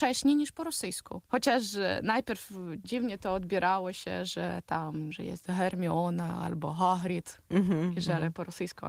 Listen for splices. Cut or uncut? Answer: cut